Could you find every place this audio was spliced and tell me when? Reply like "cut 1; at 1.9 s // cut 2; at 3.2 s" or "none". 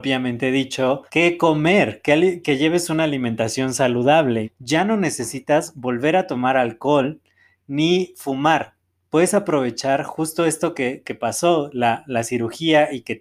cut 1; at 1.1 s // cut 2; at 2.4 s // cut 3; at 4.4 s